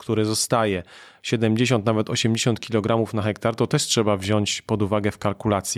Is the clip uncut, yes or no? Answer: yes